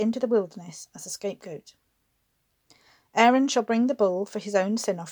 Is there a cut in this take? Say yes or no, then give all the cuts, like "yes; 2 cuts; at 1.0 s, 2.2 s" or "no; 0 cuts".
no; 0 cuts